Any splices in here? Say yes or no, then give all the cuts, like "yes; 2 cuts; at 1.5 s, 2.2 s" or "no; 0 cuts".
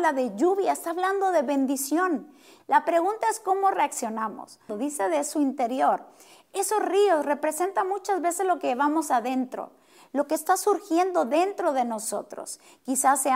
yes; 2 cuts; at 2.6 s, 4.7 s